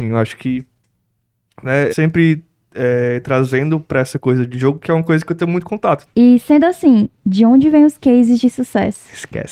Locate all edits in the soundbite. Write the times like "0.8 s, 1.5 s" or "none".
1.9 s, 6.1 s